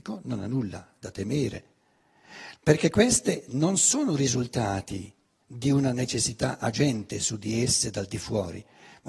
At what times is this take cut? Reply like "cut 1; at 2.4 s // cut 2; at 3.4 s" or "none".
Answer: cut 1; at 2.5 s

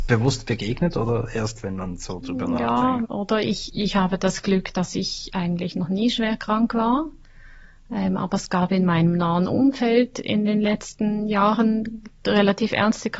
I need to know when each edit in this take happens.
cut 1; at 3.0 s

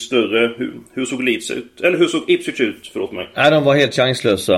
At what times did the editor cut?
none

